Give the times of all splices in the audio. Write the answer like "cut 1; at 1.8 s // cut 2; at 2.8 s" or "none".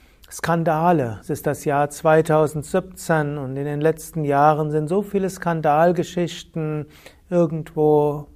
none